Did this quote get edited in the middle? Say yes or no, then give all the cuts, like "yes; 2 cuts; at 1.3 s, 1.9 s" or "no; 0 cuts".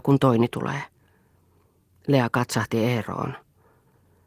no; 0 cuts